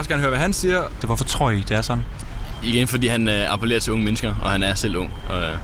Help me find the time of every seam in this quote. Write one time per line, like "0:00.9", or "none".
0:01.0